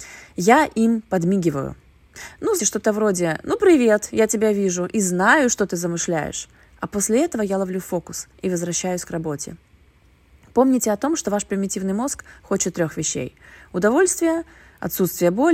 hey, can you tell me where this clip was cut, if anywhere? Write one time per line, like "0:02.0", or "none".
0:02.6